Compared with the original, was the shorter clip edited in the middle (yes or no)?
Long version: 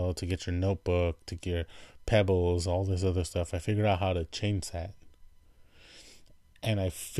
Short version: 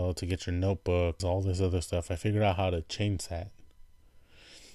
yes